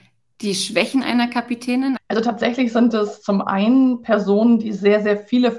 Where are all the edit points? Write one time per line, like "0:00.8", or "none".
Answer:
0:02.0